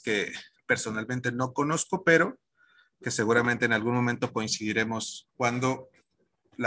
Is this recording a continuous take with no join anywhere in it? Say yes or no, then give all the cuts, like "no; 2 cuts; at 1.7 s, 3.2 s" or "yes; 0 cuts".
yes; 0 cuts